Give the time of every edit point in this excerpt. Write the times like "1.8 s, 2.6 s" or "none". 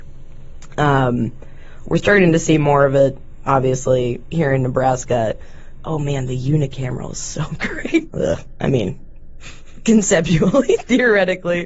5.8 s, 8.1 s